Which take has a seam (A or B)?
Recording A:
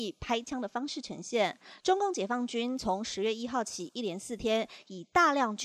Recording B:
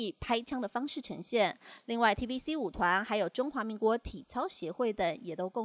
A